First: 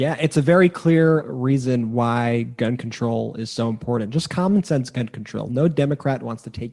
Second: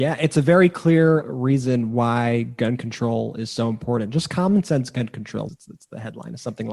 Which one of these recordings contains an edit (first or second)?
second